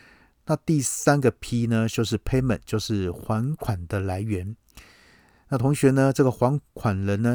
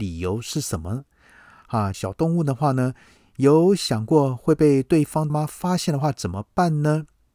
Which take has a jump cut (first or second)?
second